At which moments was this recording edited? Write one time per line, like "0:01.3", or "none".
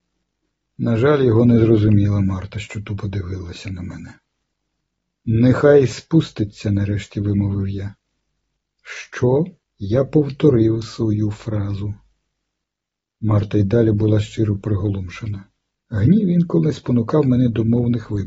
0:09.6
0:15.7